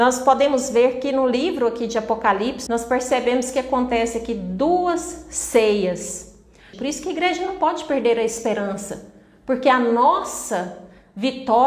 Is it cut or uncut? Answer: cut